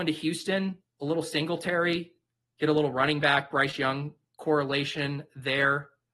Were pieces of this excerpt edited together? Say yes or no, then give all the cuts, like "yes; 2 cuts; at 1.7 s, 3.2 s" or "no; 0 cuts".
no; 0 cuts